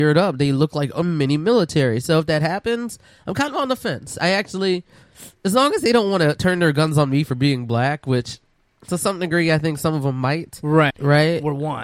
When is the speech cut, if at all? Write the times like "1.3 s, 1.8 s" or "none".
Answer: 10.9 s